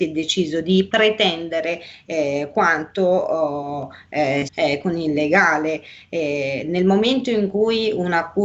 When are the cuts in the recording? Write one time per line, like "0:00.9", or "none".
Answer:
0:04.5